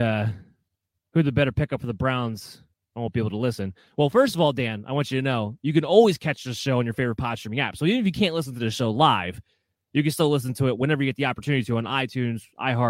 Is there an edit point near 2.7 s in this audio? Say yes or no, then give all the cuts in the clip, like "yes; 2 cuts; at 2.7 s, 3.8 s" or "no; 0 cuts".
no; 0 cuts